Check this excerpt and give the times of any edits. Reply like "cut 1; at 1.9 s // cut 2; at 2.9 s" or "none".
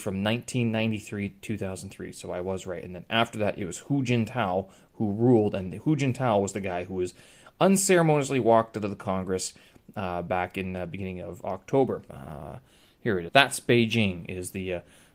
cut 1; at 12.1 s // cut 2; at 13.3 s